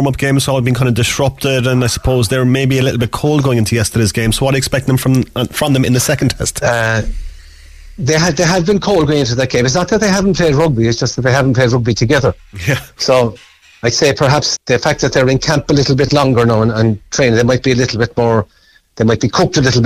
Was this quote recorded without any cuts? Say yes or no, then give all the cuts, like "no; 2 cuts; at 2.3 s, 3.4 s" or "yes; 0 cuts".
no; 1 cut; at 14.6 s